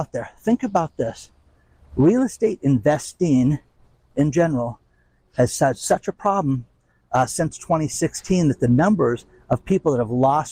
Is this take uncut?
yes; 0 cuts

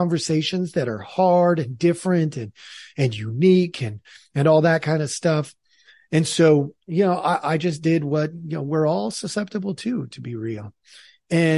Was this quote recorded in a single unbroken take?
yes; 0 cuts

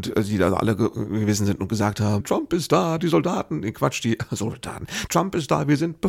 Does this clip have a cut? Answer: yes; 2 cuts; at 2.2 s, 5.1 s

